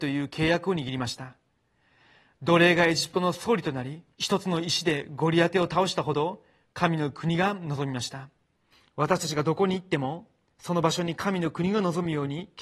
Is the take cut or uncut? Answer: cut